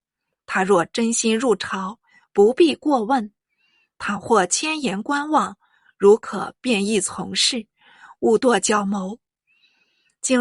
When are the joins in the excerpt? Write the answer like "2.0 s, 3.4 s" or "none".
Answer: none